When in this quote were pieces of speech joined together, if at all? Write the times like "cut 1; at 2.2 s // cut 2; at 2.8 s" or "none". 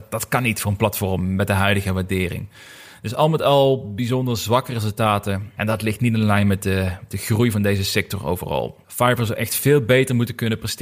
cut 1; at 5.6 s